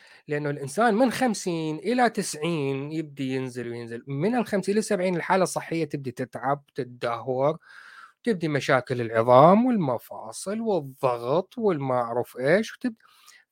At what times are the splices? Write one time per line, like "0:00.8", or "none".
0:03.6